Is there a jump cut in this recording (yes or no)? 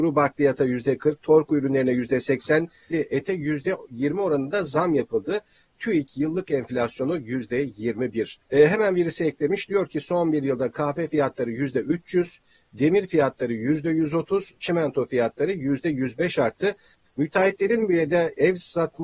yes